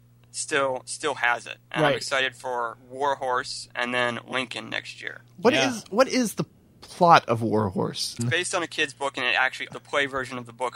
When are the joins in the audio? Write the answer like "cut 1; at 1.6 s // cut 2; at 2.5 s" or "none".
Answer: cut 1; at 8.2 s // cut 2; at 9.7 s